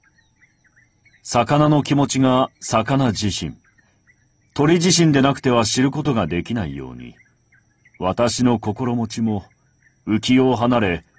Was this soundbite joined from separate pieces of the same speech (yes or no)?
no